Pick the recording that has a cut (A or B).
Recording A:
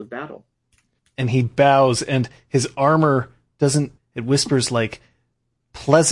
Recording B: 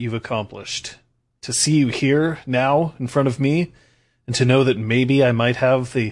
A